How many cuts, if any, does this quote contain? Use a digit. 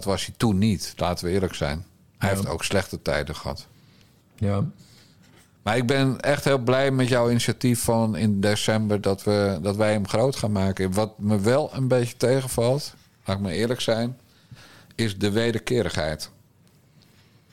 0